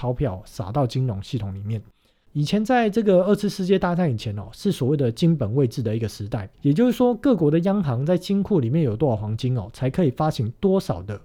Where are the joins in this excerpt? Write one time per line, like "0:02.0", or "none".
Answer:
0:02.2
0:06.5

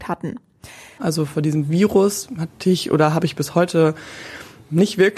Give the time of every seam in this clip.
0:01.0

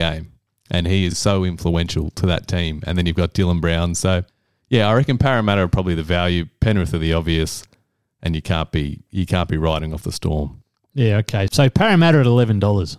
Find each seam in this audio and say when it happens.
none

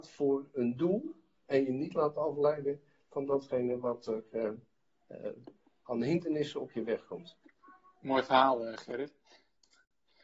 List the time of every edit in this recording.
none

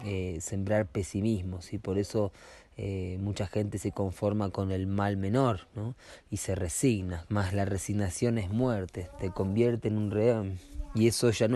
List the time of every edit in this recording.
0:05.7
0:07.3

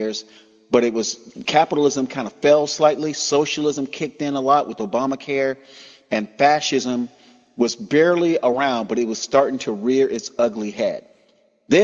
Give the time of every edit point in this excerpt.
none

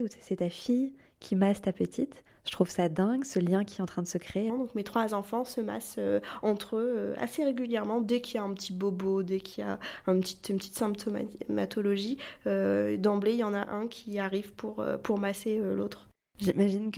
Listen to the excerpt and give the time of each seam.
0:04.5

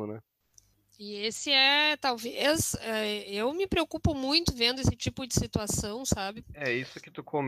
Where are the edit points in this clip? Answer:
0:06.4

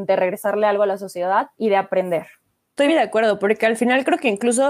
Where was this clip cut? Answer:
0:01.5
0:02.9

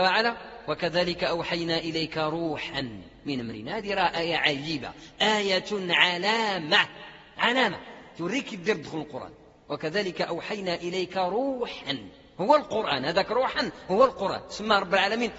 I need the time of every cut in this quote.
none

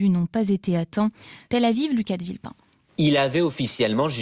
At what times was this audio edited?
0:01.5

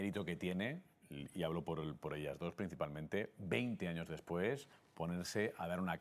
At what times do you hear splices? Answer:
none

